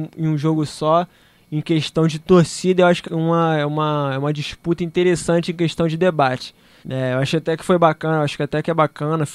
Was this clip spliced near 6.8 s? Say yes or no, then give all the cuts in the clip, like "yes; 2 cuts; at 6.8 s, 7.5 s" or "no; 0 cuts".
yes; 2 cuts; at 3.0 s, 6.8 s